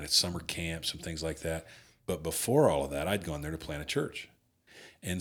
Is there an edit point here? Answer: no; 0 cuts

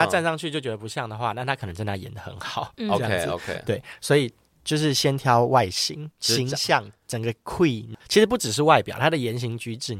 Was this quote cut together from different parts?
no; 0 cuts

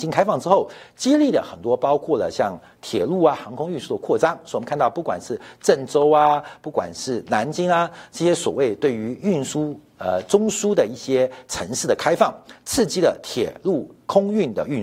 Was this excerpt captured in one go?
yes; 0 cuts

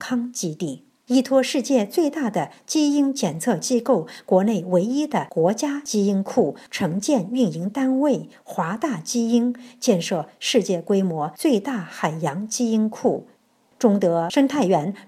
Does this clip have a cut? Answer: no; 0 cuts

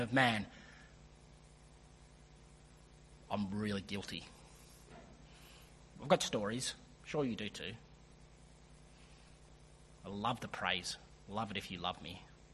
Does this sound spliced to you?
no; 0 cuts

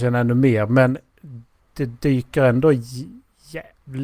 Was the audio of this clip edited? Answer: yes; 1 cut; at 1.6 s

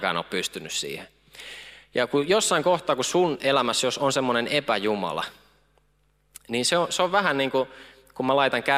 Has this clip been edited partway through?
no; 0 cuts

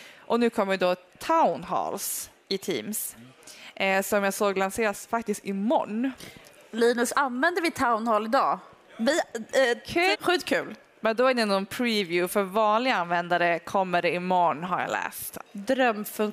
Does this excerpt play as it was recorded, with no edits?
no; 3 cuts; at 10.1 s, 12.3 s, 15.4 s

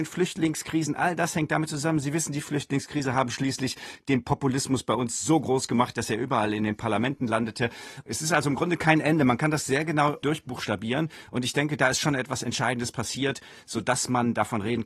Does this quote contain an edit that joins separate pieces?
no; 0 cuts

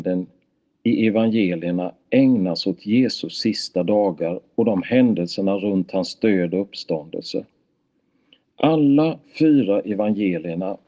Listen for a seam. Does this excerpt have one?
no; 0 cuts

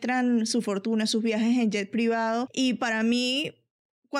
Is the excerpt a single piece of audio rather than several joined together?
yes; 0 cuts

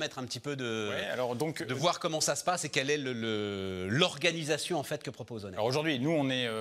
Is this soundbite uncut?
yes; 0 cuts

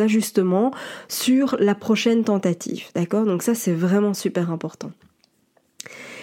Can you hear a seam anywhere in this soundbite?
no; 0 cuts

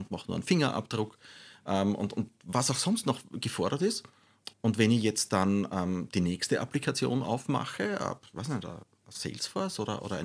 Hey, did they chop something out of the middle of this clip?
yes; 1 cut; at 4.5 s

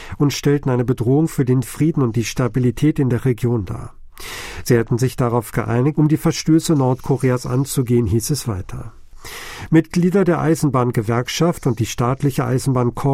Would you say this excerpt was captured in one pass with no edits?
no; 1 cut; at 6.0 s

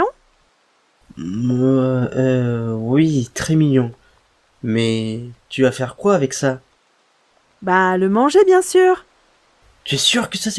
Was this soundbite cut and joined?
no; 0 cuts

